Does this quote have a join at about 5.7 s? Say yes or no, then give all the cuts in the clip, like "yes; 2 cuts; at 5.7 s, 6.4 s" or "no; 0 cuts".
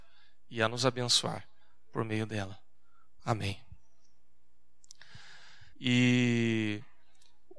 yes; 2 cuts; at 3.2 s, 5.7 s